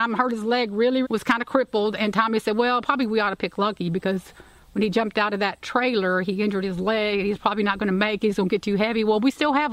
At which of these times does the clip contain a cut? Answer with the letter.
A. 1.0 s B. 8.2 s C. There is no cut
A